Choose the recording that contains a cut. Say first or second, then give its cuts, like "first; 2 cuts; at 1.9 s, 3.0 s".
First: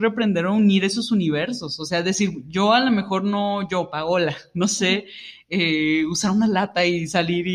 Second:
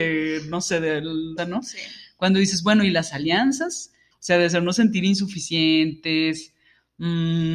second; 2 cuts; at 1.4 s, 4.1 s